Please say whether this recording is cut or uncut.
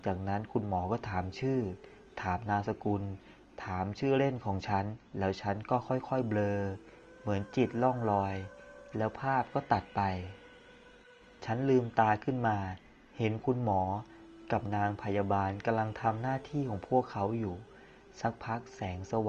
cut